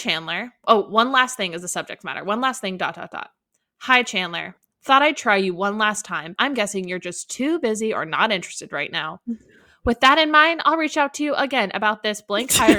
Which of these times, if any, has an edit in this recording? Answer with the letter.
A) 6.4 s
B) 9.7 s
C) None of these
A